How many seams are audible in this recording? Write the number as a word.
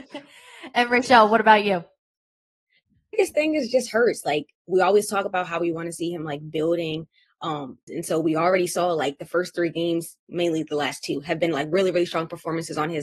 two